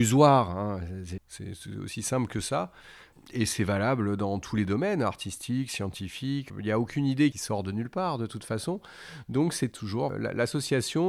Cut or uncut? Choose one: cut